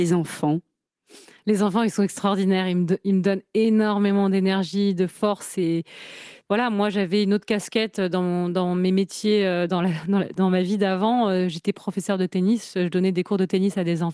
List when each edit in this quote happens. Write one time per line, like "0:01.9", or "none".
none